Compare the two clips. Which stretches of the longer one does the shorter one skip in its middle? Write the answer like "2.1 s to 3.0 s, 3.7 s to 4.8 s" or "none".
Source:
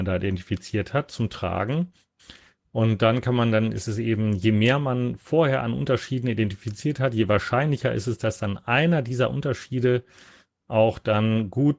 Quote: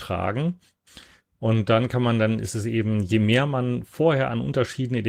none